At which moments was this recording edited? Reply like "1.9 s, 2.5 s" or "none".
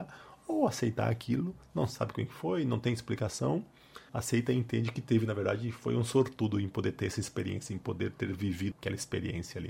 4.1 s, 8.7 s